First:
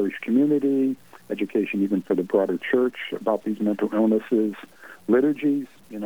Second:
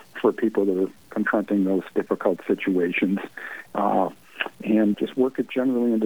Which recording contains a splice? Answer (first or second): second